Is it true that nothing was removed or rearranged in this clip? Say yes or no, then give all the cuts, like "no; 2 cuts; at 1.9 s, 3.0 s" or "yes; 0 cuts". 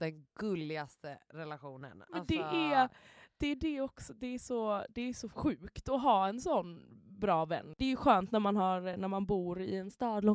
yes; 0 cuts